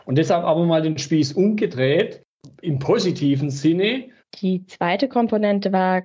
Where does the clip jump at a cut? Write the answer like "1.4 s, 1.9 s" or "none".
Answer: 4.2 s